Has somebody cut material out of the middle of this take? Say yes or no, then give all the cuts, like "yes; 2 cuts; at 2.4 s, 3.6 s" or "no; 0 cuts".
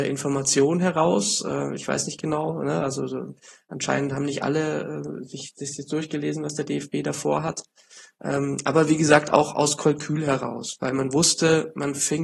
no; 0 cuts